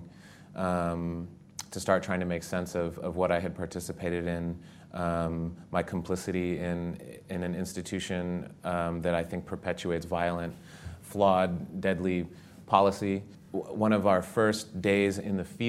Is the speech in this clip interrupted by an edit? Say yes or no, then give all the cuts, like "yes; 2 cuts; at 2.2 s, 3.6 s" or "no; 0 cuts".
no; 0 cuts